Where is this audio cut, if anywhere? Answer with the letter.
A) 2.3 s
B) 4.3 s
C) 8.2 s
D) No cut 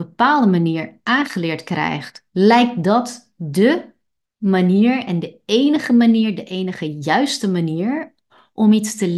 A